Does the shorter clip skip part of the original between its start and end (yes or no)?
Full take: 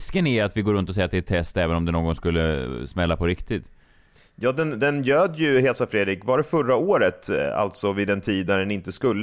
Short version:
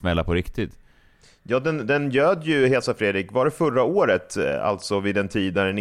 no